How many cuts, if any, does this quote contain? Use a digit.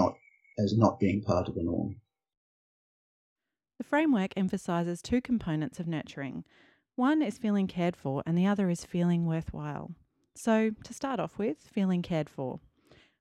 0